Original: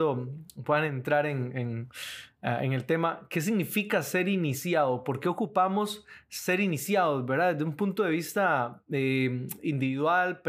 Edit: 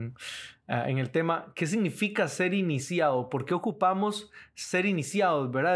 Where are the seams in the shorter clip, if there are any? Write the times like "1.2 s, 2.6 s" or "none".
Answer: none